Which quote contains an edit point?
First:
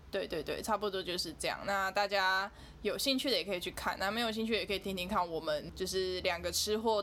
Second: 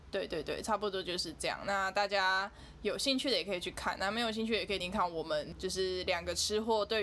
second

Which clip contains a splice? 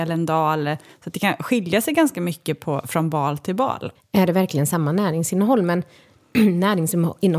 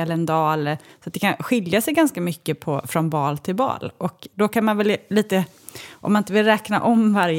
first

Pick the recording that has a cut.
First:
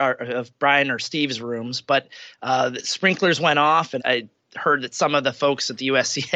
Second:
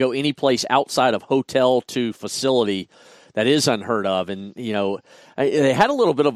first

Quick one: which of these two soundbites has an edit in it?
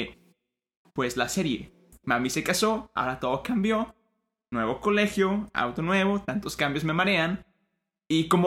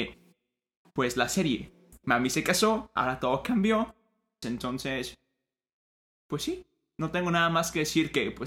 second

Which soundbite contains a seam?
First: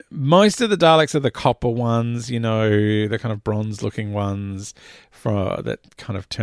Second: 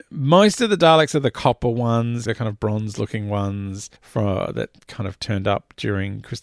second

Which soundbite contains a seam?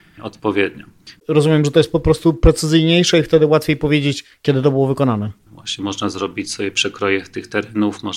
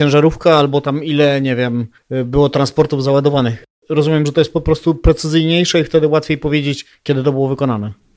first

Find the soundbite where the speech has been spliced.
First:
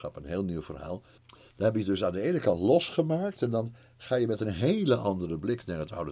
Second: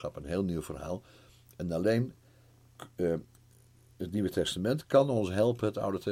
first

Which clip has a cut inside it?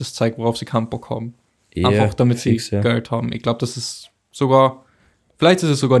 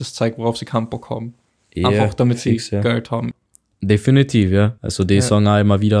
second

